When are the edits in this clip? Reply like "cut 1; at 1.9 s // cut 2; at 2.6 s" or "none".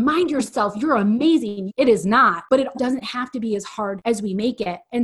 cut 1; at 1.7 s // cut 2; at 2.7 s